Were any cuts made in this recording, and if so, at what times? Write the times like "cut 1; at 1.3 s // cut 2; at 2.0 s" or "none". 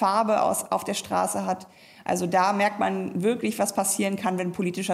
none